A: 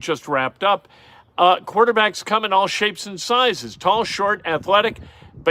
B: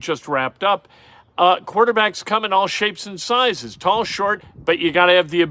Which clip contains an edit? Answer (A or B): B